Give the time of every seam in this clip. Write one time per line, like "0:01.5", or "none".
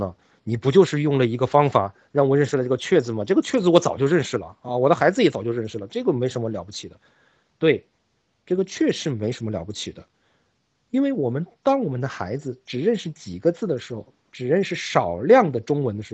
none